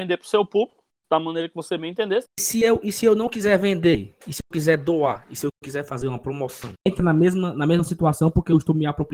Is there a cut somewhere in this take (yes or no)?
yes